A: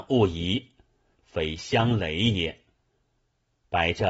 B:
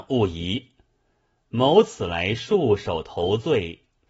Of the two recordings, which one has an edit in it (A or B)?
A